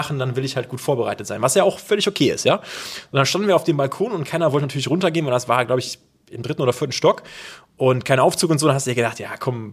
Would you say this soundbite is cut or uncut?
uncut